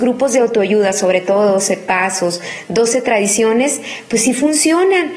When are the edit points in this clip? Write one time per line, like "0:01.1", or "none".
none